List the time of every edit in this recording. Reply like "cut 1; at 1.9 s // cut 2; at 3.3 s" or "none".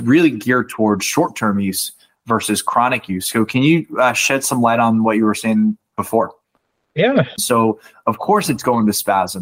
cut 1; at 7.4 s